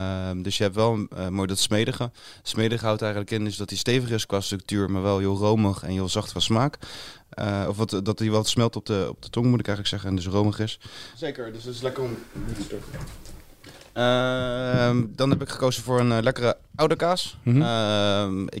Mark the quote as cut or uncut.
cut